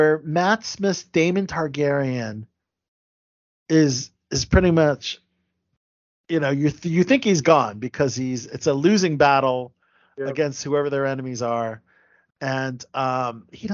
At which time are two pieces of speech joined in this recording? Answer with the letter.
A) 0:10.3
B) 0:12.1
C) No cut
C